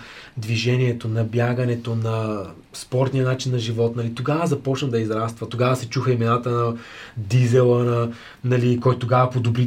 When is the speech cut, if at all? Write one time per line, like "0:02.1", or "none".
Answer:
none